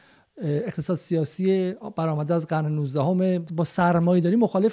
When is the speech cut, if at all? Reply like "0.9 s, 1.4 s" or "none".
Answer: 3.5 s